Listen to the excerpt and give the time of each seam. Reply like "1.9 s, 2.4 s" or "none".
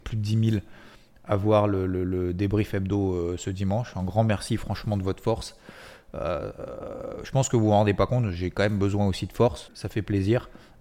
9.7 s